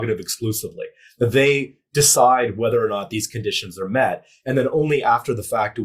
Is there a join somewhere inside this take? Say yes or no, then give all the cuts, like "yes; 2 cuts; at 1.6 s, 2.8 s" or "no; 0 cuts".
no; 0 cuts